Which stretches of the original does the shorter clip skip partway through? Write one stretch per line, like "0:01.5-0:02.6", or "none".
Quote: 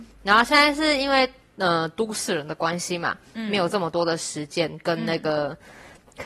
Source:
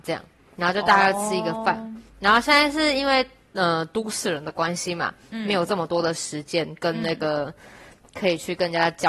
none